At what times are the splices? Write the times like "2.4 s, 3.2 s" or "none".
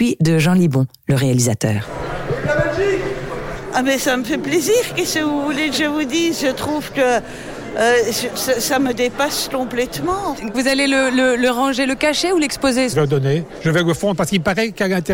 10.5 s, 12.9 s